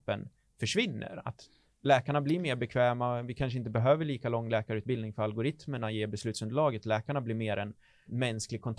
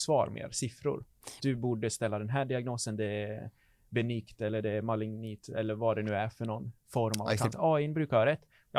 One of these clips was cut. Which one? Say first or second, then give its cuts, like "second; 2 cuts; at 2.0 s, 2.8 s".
second; 2 cuts; at 1.4 s, 7.5 s